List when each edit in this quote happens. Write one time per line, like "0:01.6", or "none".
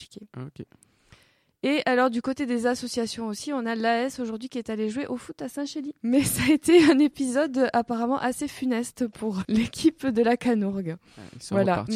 0:09.4